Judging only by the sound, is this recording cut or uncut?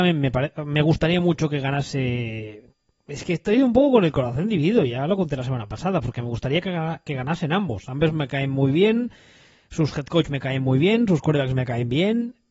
uncut